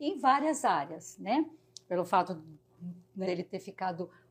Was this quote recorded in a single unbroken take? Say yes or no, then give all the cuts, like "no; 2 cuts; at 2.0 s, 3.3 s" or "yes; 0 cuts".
no; 1 cut; at 3.2 s